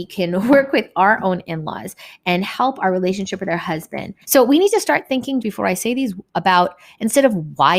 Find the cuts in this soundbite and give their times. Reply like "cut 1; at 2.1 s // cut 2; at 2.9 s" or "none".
cut 1; at 4.2 s // cut 2; at 5.4 s